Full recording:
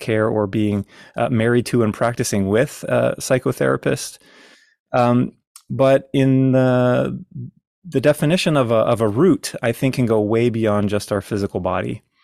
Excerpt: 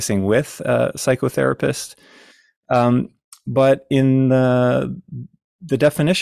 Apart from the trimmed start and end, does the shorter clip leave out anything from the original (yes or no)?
no